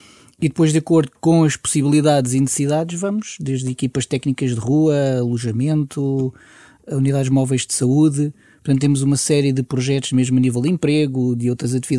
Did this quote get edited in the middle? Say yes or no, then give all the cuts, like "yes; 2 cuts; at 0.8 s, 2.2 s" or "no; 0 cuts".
no; 0 cuts